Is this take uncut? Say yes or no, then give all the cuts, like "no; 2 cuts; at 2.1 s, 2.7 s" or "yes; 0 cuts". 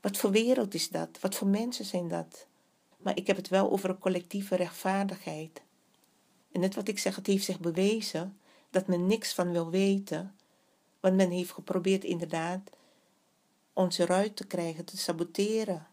no; 2 cuts; at 2.9 s, 6.4 s